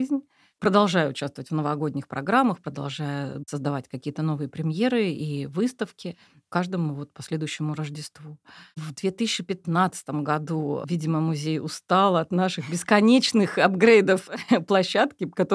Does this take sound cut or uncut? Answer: uncut